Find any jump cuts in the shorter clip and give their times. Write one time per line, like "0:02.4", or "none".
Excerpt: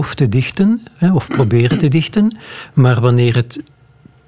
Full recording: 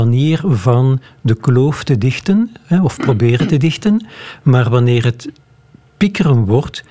none

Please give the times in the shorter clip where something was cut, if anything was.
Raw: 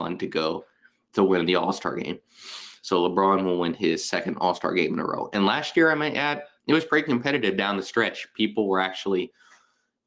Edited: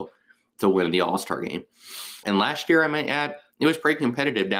0:02.2

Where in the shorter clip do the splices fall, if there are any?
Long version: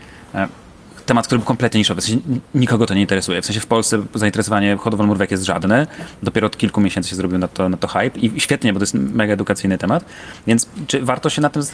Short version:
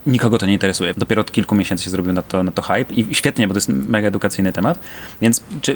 0:00.9

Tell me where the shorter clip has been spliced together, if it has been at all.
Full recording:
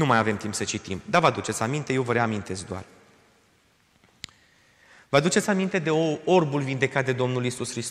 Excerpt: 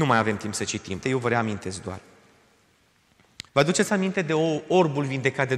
0:01.0
0:03.5

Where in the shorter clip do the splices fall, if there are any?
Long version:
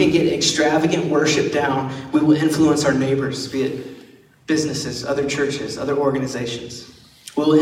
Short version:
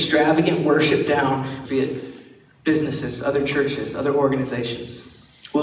0:01.7

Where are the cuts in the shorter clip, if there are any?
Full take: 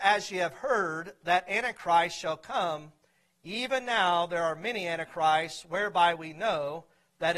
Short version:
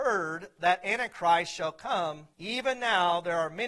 0:02.3

